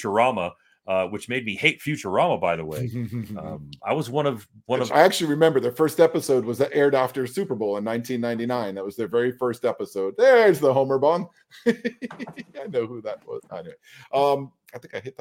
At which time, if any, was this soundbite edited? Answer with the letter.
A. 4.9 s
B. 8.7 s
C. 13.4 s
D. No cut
A